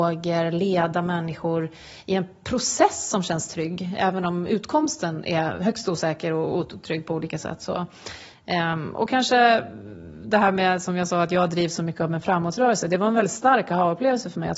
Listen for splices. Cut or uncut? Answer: uncut